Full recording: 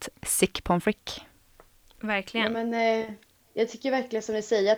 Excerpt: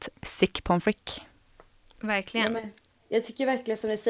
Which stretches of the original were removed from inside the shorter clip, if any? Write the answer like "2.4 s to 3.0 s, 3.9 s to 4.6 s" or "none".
2.6 s to 3.0 s